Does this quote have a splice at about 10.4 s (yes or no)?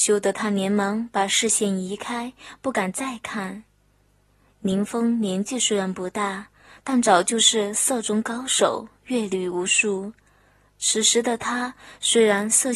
no